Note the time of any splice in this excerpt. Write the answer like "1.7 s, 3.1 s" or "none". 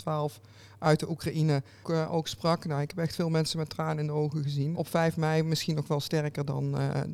1.8 s, 4.7 s